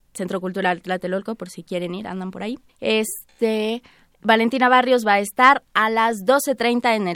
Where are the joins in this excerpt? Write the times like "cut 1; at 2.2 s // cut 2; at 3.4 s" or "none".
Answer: cut 1; at 2.7 s